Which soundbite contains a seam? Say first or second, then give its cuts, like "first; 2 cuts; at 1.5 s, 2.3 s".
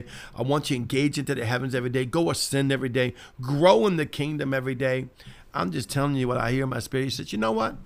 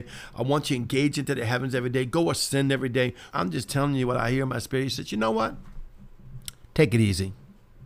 second; 1 cut; at 3.3 s